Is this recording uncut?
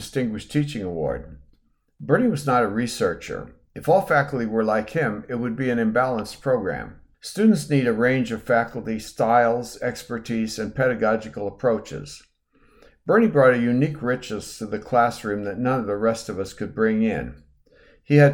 no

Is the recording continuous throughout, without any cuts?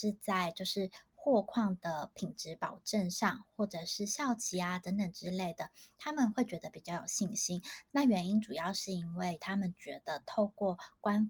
no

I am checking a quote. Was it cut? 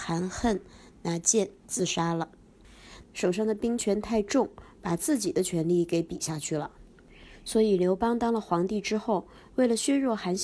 yes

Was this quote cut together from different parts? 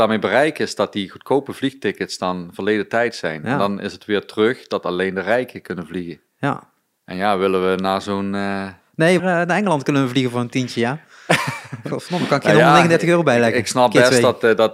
yes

